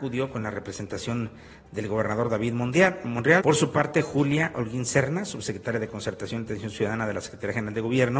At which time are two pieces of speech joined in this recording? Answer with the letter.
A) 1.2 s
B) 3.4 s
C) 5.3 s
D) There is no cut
B